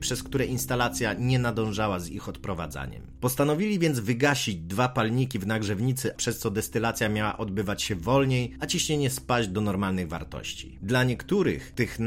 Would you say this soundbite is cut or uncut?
cut